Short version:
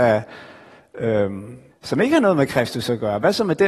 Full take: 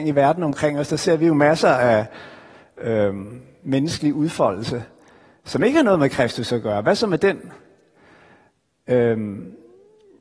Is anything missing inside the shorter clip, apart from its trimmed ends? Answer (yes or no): yes